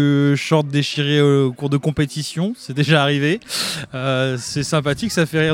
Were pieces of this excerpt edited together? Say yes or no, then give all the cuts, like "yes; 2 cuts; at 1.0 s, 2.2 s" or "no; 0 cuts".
no; 0 cuts